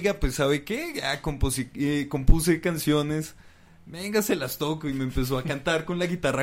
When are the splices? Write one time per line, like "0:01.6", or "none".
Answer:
none